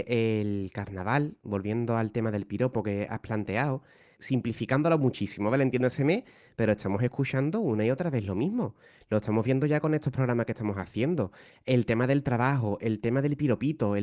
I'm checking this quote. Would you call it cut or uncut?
cut